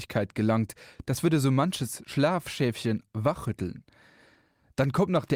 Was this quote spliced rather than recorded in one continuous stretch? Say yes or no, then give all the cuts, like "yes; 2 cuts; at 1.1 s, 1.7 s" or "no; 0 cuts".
no; 0 cuts